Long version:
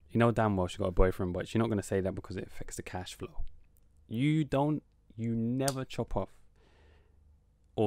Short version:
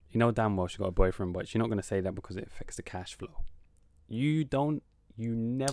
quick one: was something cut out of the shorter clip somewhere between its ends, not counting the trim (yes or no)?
no